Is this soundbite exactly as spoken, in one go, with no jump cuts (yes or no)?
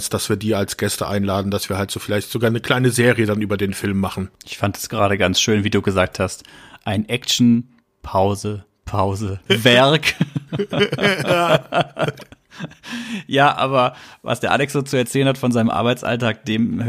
no